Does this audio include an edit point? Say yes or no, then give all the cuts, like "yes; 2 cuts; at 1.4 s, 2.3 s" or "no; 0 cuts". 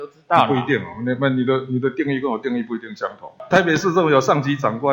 no; 0 cuts